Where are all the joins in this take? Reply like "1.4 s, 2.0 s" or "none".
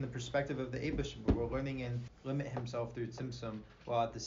2.1 s